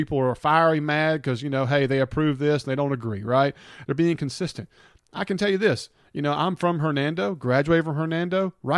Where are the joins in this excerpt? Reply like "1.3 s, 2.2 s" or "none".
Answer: 3.8 s